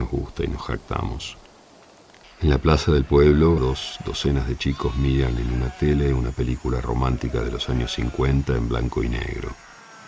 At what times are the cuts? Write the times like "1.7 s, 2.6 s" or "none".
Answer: 2.2 s, 3.6 s